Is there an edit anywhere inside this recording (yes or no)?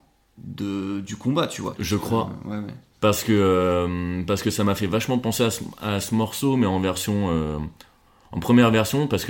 yes